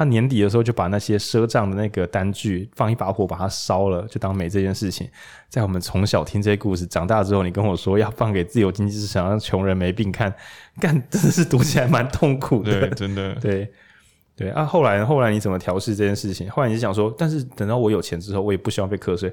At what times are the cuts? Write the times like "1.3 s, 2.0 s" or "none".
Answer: none